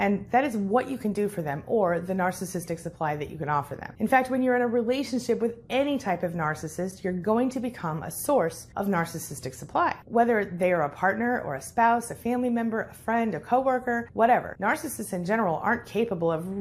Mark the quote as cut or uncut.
uncut